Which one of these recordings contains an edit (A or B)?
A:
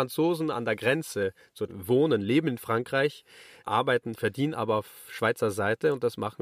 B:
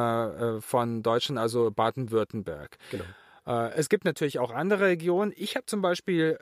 A